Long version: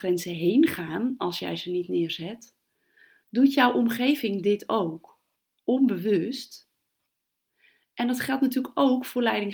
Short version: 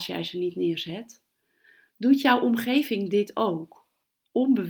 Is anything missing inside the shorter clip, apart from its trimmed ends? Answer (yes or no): no